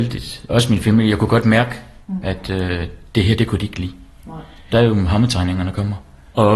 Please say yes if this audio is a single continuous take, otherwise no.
no